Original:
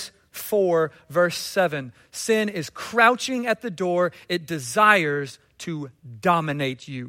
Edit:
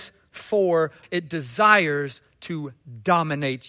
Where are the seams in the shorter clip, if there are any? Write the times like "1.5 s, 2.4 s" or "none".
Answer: 1.0 s

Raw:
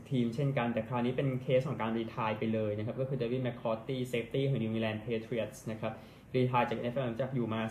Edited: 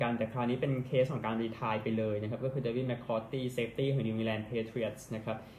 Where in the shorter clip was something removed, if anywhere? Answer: none

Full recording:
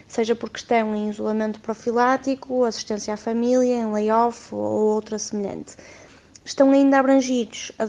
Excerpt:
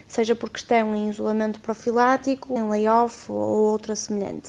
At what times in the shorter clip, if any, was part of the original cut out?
2.6 s

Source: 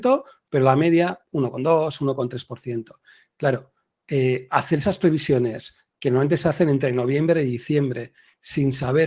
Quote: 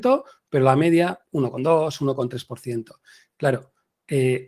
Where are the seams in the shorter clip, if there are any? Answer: none

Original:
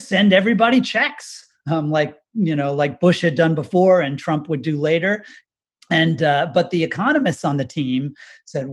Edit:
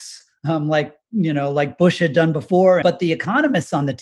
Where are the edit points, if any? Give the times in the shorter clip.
2.8 s

